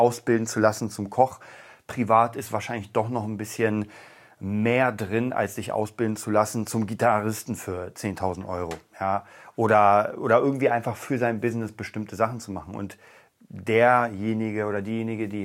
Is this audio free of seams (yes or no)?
yes